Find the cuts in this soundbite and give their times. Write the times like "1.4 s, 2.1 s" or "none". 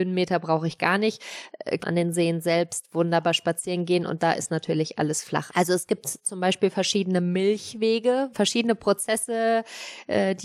1.8 s, 5.5 s, 8.3 s

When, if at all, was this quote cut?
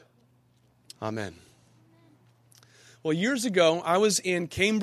0.9 s

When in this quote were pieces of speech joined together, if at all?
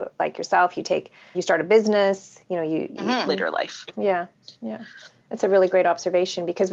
1.3 s, 3.3 s

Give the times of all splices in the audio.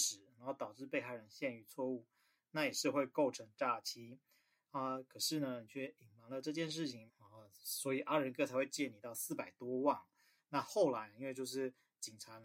4.6 s, 7.1 s, 10.4 s

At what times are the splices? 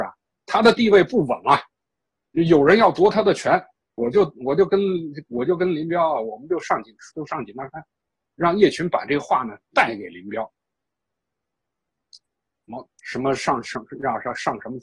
4.0 s, 7.1 s, 13.0 s

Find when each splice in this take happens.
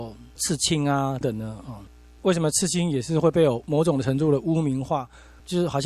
1.2 s

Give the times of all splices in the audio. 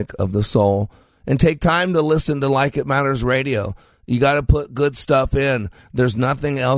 none

